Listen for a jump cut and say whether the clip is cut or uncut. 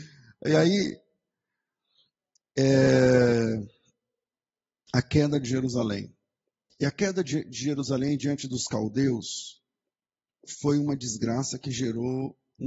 uncut